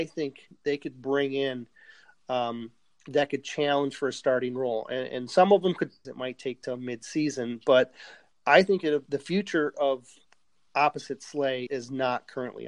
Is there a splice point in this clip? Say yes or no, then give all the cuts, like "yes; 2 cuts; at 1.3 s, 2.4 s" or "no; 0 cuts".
yes; 3 cuts; at 6.0 s, 9.1 s, 11.7 s